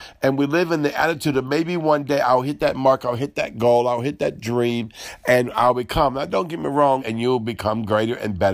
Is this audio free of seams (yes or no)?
no